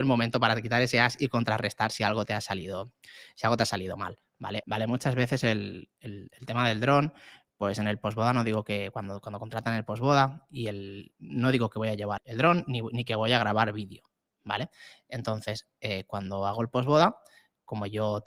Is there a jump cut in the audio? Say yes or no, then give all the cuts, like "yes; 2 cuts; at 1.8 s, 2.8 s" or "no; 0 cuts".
yes; 2 cuts; at 4.6 s, 12.2 s